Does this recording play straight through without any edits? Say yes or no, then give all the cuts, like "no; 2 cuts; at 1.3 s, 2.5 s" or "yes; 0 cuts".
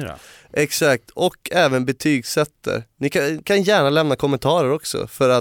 yes; 0 cuts